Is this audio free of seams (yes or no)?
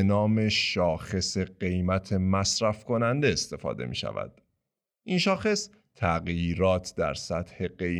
yes